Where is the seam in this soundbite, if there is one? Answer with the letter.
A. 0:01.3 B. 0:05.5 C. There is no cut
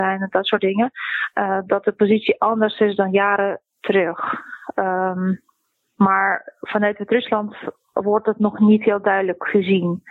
C